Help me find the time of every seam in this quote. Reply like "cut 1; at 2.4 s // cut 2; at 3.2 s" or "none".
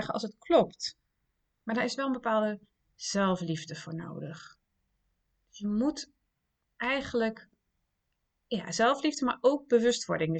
none